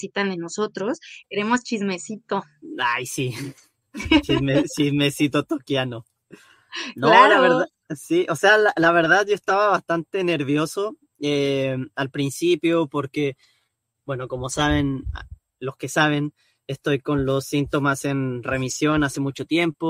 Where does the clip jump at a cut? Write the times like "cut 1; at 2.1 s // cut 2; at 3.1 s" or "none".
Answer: cut 1; at 1.2 s